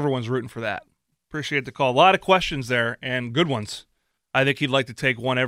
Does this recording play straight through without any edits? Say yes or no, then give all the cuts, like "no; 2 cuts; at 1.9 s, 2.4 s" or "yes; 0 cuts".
no; 2 cuts; at 1.1 s, 4.2 s